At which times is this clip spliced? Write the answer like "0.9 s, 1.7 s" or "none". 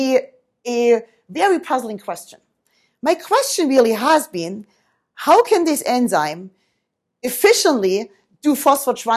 none

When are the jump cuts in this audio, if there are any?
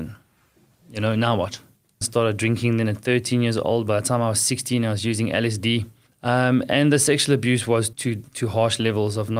2.0 s, 6.1 s, 7.9 s

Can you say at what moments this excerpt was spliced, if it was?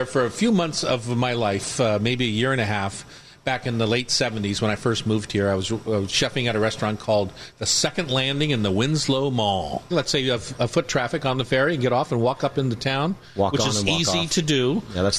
9.9 s

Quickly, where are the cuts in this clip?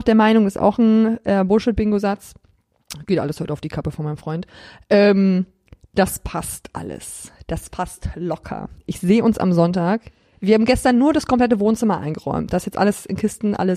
none

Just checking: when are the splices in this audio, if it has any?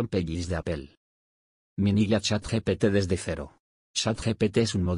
3.8 s

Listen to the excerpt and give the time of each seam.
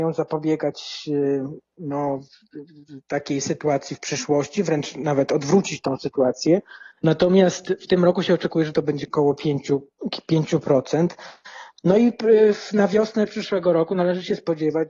6.9 s, 9.1 s

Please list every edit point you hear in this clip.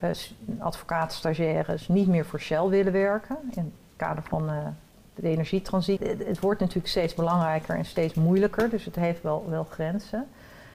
6.0 s

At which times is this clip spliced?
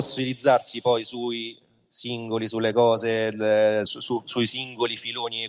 3.8 s

